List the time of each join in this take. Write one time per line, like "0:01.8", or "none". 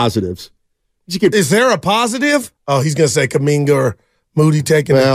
0:02.6